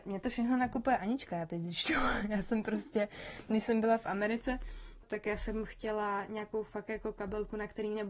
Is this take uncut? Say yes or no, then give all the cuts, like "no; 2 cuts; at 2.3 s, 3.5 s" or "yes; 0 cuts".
no; 1 cut; at 5.0 s